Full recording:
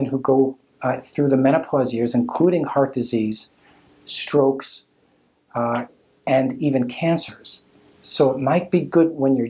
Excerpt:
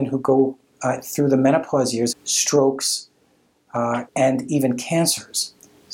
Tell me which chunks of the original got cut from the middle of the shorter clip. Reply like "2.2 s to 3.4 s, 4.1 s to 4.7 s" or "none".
2.1 s to 3.9 s, 5.9 s to 6.2 s